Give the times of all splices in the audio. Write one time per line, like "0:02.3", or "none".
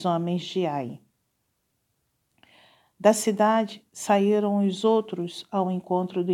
none